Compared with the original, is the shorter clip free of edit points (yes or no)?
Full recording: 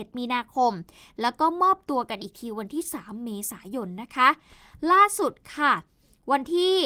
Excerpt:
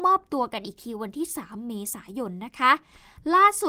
yes